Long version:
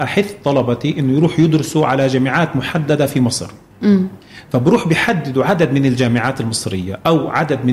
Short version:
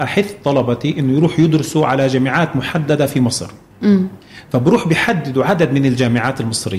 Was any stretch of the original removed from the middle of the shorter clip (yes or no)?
no